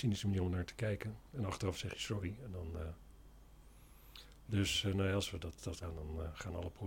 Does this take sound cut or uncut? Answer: cut